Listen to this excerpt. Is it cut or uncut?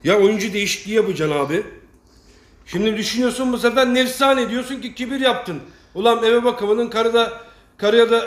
uncut